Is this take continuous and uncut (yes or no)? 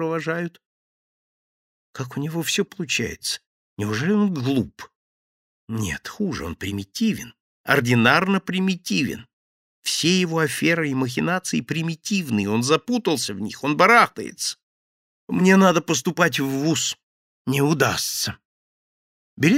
no